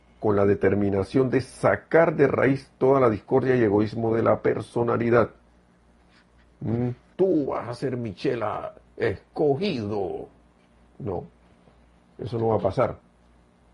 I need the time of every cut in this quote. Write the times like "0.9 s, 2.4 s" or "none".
7.1 s